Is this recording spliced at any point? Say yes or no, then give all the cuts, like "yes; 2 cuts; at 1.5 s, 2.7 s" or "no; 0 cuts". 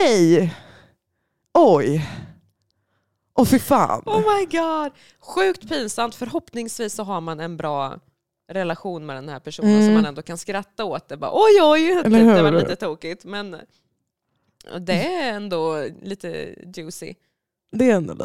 no; 0 cuts